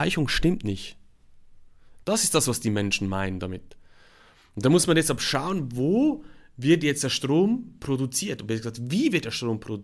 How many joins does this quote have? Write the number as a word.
one